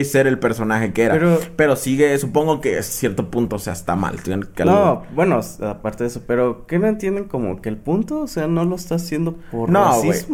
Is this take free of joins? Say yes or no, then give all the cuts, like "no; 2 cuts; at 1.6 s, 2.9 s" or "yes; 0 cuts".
yes; 0 cuts